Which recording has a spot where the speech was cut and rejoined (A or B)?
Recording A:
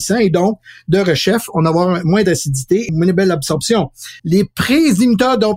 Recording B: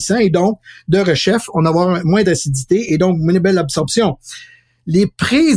A